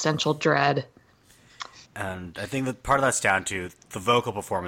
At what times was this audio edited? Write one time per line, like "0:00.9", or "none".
0:01.8